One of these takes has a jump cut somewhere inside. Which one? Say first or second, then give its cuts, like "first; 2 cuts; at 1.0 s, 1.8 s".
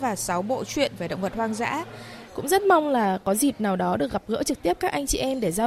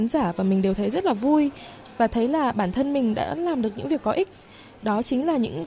first; 1 cut; at 2.3 s